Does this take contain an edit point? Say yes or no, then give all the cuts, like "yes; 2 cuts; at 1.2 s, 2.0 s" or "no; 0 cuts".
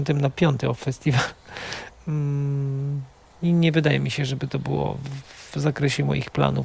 yes; 1 cut; at 1.9 s